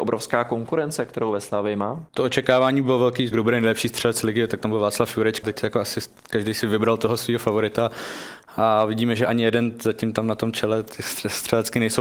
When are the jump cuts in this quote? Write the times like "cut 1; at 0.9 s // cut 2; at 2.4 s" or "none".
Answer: cut 1; at 2.1 s // cut 2; at 3.3 s // cut 3; at 5.4 s